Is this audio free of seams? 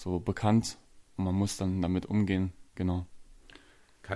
no; 1 cut; at 2.7 s

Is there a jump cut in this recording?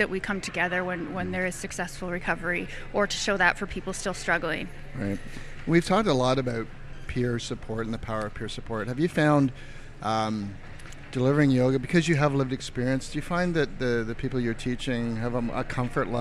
no; 0 cuts

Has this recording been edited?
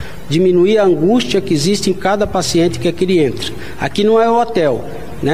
no; 0 cuts

